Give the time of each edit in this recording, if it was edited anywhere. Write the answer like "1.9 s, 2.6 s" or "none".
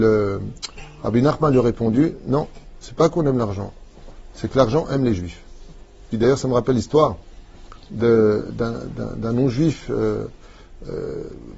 6.1 s